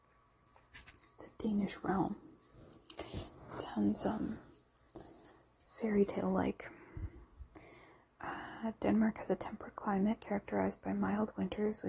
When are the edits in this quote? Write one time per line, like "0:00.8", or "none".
none